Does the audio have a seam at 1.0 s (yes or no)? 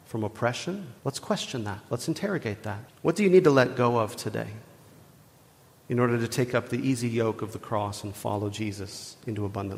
yes